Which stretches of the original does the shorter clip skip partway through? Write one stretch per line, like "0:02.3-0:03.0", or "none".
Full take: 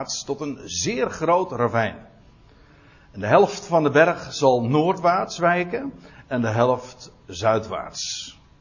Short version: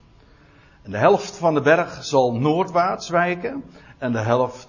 none